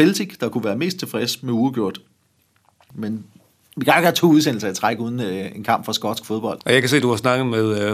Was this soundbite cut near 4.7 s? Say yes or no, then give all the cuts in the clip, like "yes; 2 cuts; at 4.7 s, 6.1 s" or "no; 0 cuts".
no; 2 cuts; at 2.9 s, 6.6 s